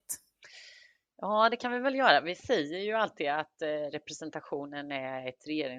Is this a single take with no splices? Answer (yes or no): yes